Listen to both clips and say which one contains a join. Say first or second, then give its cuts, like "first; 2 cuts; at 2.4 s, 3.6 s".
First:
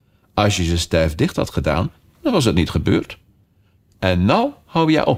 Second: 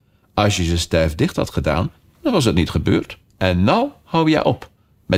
second; 1 cut; at 3.3 s